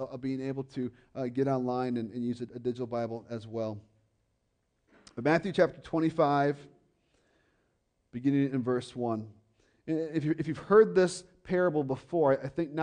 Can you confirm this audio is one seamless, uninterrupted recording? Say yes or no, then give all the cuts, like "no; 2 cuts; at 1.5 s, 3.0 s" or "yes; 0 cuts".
yes; 0 cuts